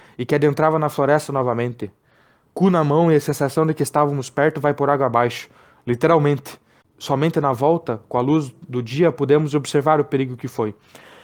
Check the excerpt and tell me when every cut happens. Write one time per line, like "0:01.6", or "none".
0:06.8